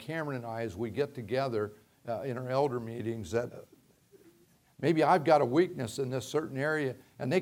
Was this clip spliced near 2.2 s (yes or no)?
no